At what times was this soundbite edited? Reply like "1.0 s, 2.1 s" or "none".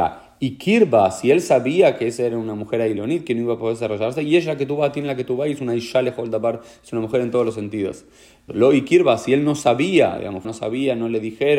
8.5 s, 10.4 s